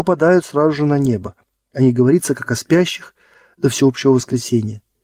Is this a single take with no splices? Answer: yes; 0 cuts

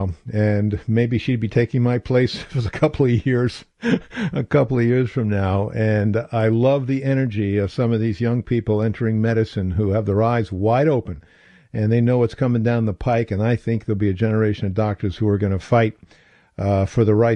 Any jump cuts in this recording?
no; 0 cuts

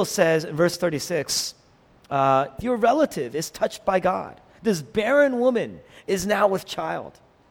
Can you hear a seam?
yes; 1 cut; at 2.6 s

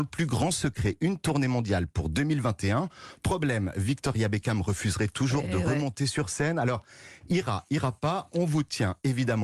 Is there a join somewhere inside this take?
no; 0 cuts

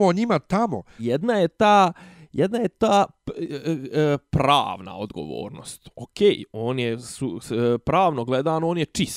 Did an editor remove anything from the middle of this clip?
yes; 1 cut; at 1.0 s

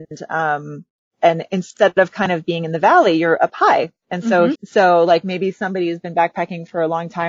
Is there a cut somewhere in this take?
yes; 1 cut; at 4.6 s

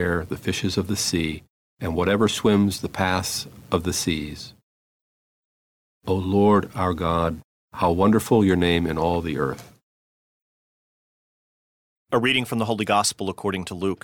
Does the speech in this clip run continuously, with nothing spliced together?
yes; 0 cuts

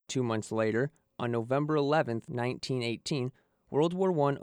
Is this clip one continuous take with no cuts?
yes; 0 cuts

